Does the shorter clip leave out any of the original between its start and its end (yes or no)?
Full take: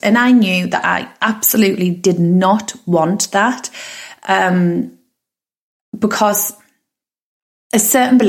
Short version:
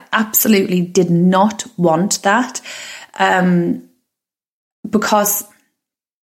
no